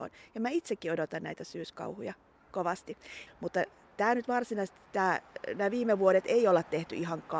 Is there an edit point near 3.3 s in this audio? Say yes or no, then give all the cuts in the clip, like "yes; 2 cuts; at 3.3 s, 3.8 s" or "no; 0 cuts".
yes; 1 cut; at 3.3 s